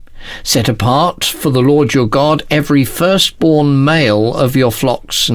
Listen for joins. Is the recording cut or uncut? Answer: uncut